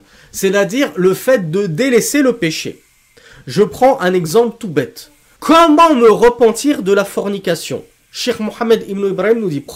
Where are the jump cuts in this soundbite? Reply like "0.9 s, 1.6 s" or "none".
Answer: 5.4 s